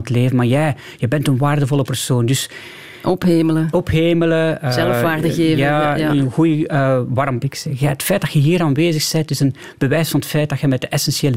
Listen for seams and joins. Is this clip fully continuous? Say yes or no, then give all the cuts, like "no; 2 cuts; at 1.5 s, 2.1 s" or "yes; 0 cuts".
no; 1 cut; at 7.4 s